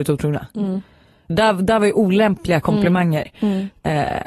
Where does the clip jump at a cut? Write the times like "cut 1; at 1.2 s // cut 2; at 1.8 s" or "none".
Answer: cut 1; at 1.3 s